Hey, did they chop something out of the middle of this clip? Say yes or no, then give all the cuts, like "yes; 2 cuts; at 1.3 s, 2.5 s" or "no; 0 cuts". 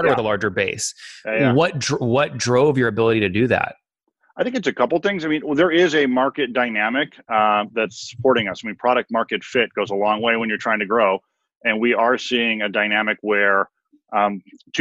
no; 0 cuts